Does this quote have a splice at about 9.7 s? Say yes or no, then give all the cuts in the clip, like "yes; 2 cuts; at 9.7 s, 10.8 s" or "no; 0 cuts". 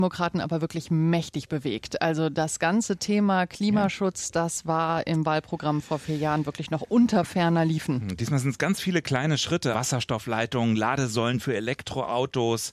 yes; 1 cut; at 9.7 s